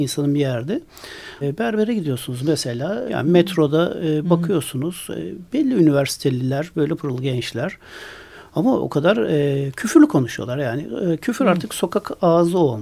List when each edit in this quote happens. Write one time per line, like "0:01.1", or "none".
0:01.4
0:03.1
0:07.0